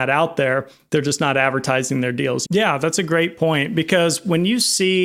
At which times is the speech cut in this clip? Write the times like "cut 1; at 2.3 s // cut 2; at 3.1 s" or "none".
cut 1; at 2.4 s